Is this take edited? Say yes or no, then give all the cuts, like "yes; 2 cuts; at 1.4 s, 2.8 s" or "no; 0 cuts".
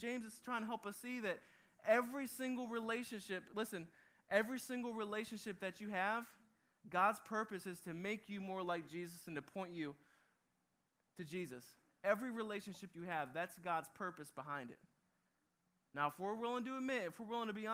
no; 0 cuts